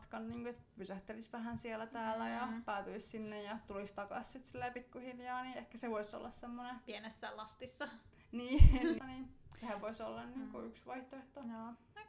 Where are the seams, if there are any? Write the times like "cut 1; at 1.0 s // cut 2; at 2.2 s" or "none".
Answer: cut 1; at 9.0 s